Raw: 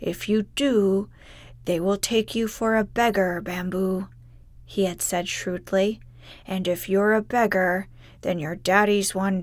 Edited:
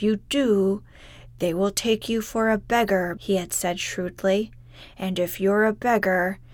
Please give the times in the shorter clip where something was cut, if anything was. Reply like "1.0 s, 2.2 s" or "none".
3.2 s